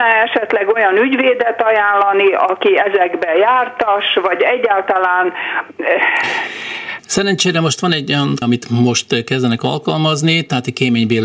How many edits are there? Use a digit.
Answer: 2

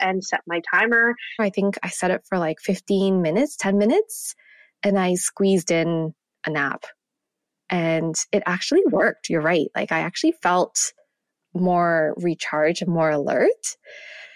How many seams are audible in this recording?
1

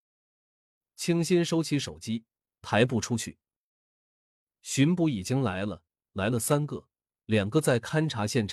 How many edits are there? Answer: 1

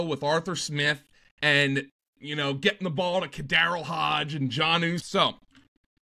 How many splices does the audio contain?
1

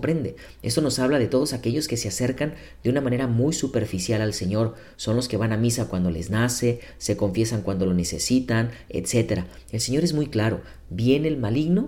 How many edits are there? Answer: 0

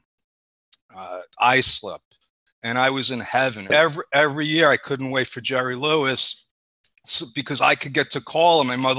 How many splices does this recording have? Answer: 1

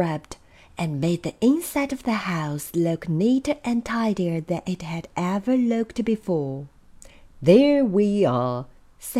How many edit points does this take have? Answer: 0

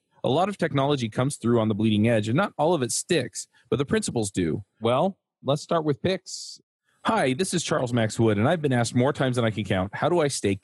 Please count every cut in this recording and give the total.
1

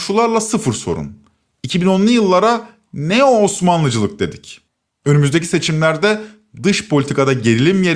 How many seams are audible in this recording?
1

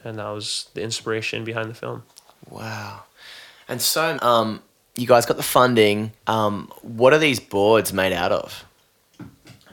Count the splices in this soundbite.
2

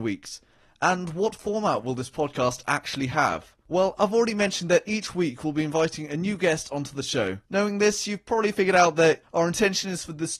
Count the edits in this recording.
3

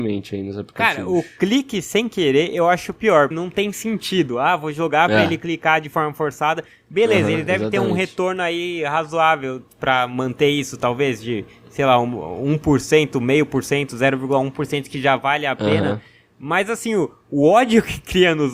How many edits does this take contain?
1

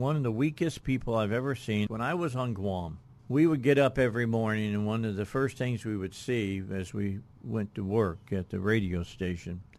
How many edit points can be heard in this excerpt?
2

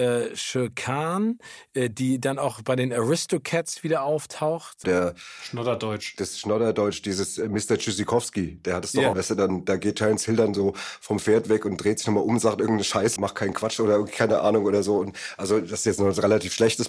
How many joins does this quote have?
3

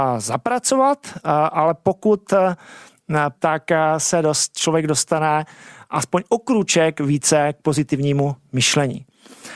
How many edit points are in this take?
1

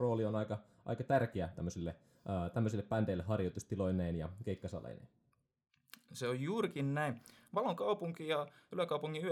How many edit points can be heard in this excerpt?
0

